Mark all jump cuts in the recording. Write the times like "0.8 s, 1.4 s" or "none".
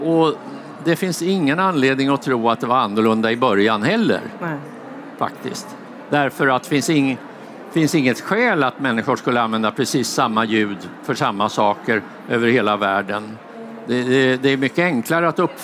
none